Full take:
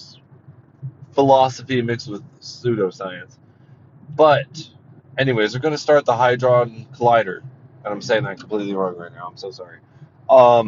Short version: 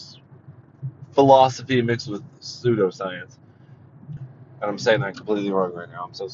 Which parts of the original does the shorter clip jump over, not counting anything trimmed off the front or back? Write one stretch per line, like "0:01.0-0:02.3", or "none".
0:04.2-0:07.4